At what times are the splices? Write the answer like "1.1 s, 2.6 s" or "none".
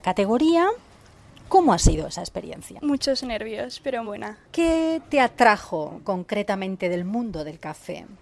4.0 s